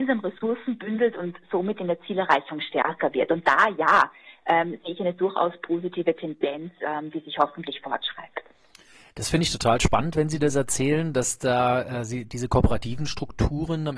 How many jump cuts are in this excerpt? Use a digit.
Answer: 0